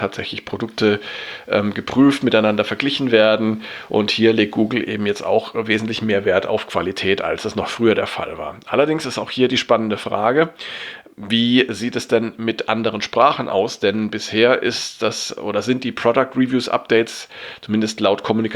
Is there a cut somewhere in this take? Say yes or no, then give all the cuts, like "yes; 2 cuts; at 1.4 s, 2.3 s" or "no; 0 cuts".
no; 0 cuts